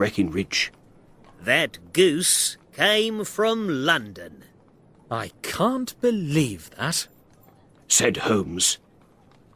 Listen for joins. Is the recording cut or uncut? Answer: uncut